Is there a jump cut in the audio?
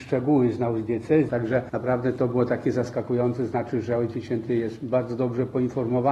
yes; 1 cut; at 1.3 s

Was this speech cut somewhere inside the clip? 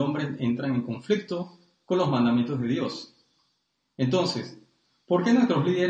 no; 0 cuts

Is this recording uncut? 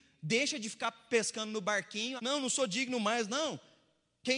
no; 2 cuts; at 2.2 s, 3.3 s

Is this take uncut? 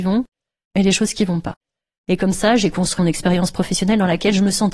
no; 2 cuts; at 1.9 s, 3.0 s

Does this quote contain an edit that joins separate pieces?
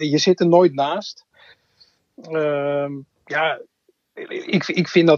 no; 0 cuts

